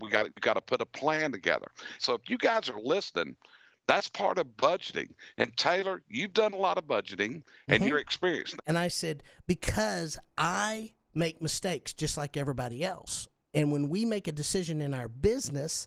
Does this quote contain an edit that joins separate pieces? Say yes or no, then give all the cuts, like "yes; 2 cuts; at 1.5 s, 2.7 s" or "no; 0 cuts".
yes; 2 cuts; at 2.0 s, 8.6 s